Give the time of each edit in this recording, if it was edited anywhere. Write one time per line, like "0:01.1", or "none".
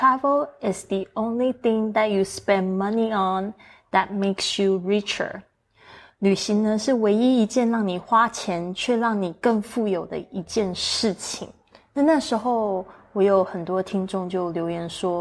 none